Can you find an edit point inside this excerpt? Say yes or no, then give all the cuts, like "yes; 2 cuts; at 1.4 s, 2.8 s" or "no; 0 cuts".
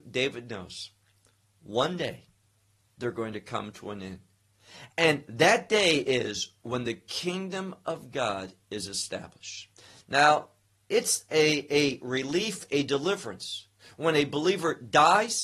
no; 0 cuts